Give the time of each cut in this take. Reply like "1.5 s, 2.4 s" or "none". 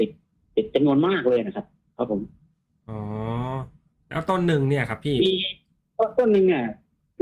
none